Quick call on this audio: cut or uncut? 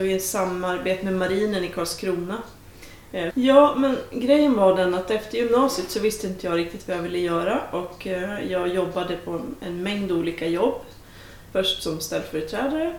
cut